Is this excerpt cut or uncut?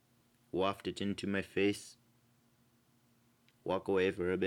uncut